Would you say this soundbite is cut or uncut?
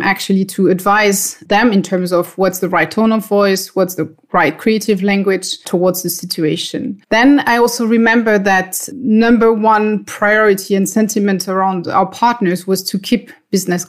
uncut